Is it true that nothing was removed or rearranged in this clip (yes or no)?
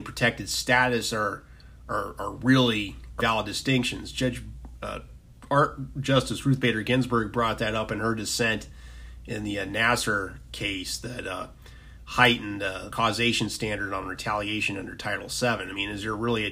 no